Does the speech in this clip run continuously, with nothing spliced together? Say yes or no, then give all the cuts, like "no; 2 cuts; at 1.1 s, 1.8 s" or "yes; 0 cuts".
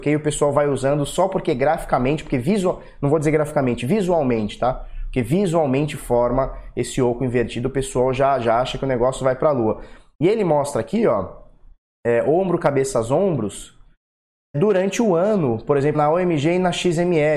no; 2 cuts; at 14.5 s, 15.9 s